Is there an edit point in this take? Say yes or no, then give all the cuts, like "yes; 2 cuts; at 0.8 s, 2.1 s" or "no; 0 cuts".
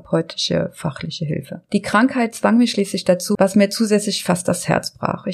yes; 1 cut; at 3.3 s